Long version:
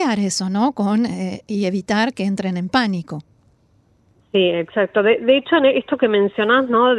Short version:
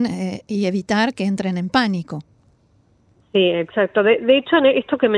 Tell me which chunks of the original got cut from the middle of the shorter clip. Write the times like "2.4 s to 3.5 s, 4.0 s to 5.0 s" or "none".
none